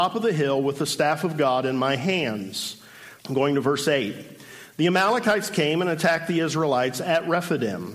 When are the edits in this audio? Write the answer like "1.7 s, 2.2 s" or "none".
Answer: 3.2 s

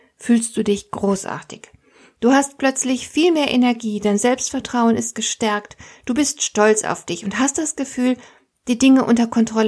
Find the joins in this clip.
none

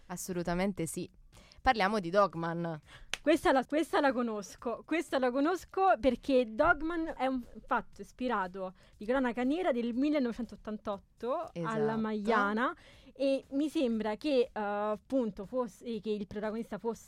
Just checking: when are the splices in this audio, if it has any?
3.6 s, 7.2 s

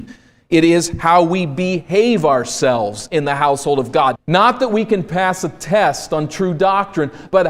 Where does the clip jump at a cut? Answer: 4.2 s

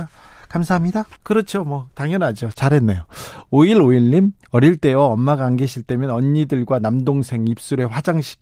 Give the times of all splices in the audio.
1.2 s

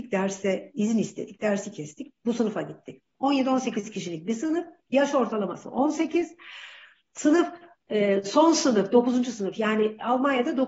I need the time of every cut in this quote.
none

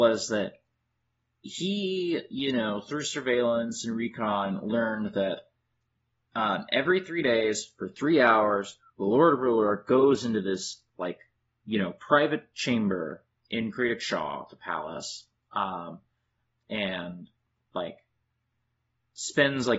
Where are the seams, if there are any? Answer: none

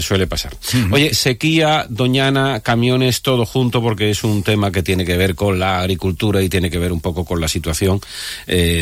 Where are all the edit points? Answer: 1.1 s

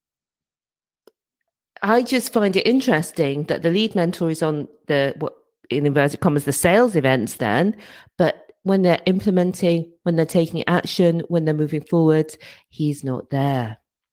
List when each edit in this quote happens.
none

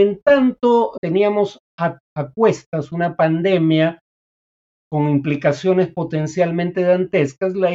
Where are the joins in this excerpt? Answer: 1.0 s

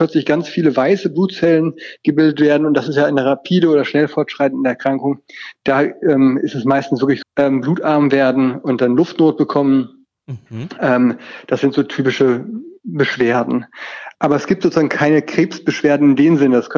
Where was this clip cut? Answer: 7.2 s

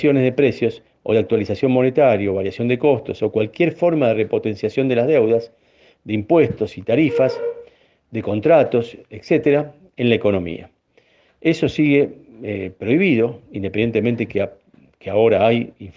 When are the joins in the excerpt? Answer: none

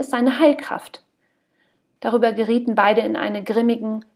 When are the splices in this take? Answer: 2.0 s

